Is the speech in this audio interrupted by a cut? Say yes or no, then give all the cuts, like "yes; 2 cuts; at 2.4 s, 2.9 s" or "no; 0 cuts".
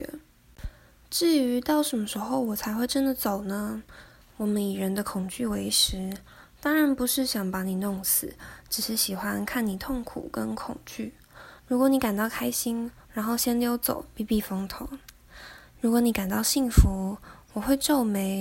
yes; 3 cuts; at 4.2 s, 11.6 s, 13.0 s